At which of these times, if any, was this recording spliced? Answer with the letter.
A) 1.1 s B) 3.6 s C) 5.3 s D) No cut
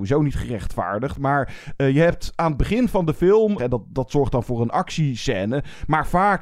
B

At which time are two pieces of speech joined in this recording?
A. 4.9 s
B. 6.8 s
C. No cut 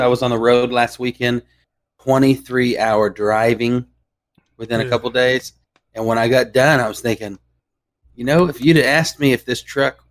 C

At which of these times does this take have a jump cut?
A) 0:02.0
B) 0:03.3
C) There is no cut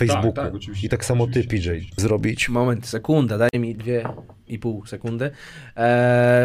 A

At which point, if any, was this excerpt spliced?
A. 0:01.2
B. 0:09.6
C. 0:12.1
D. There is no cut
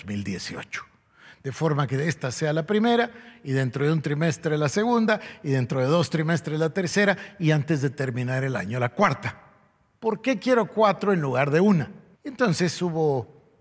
C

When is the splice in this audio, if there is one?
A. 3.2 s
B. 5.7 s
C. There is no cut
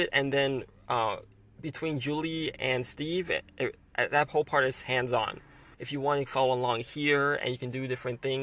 B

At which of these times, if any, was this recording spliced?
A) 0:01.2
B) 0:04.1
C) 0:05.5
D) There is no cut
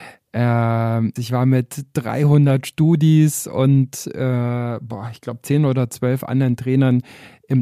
A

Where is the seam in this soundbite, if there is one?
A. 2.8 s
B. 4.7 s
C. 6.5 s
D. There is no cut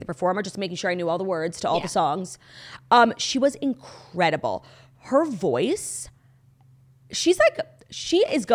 D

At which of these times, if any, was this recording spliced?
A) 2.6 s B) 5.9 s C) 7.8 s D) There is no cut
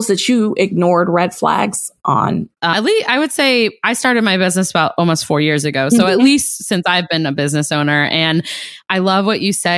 A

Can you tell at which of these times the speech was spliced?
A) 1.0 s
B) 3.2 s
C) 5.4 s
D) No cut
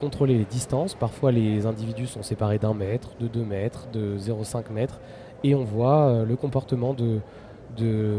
D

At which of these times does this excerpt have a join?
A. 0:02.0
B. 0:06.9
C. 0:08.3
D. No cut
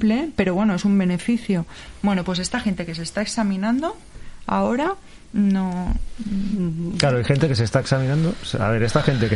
D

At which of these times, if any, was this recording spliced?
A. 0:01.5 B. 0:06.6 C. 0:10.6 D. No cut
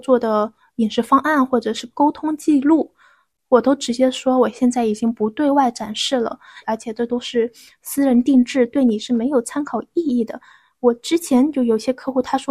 B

